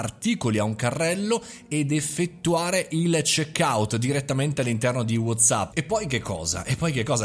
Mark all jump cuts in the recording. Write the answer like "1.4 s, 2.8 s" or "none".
5.7 s

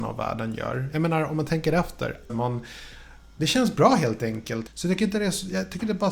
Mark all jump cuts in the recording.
2.3 s, 4.7 s

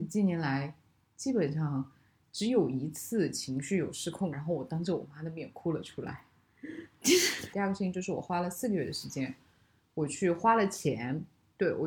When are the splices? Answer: 4.3 s, 7.5 s

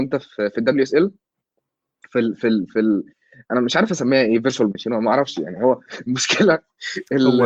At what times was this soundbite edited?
none

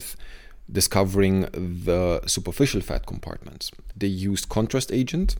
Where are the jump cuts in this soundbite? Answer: 3.9 s

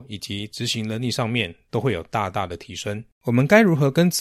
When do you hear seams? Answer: 3.1 s

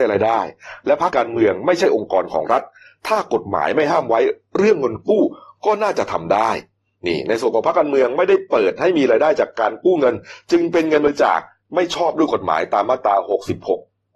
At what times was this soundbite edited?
1.1 s

